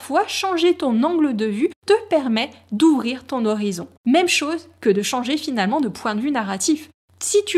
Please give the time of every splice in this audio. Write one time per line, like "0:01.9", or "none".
0:04.0